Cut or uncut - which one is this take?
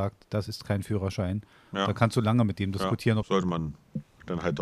cut